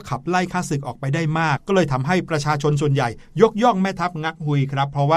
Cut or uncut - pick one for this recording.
cut